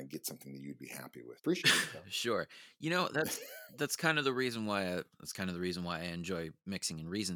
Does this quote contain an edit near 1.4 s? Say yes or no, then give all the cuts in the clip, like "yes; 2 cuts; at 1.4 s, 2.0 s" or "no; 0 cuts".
yes; 2 cuts; at 1.4 s, 5.1 s